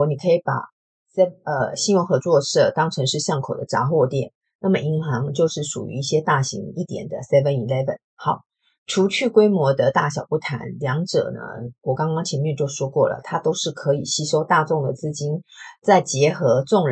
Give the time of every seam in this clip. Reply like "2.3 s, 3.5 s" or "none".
none